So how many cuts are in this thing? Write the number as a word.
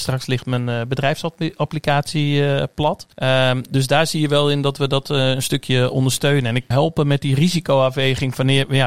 two